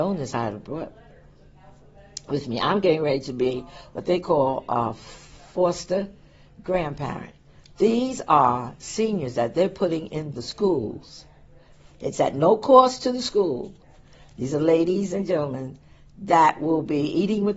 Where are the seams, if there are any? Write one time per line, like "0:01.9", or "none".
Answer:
none